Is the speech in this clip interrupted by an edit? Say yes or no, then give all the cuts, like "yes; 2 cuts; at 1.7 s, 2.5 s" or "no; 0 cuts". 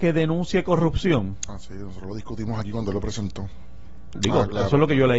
yes; 1 cut; at 4.2 s